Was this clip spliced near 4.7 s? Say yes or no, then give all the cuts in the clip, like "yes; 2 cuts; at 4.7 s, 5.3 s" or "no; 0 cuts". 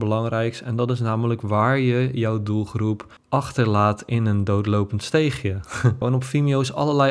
no; 2 cuts; at 3.2 s, 6.0 s